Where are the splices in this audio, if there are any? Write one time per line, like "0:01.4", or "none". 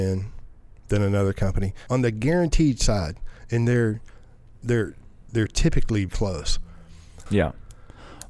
0:01.9
0:06.1
0:07.3